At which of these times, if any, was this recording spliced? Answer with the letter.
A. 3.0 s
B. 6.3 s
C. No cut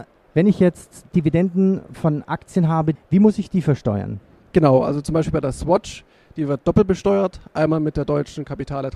A